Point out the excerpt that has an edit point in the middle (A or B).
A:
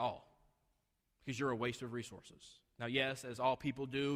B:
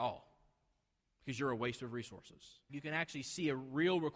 B